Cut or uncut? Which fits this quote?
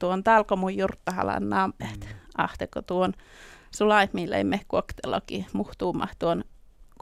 cut